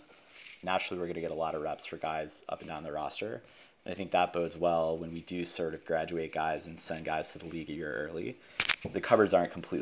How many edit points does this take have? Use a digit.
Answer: 0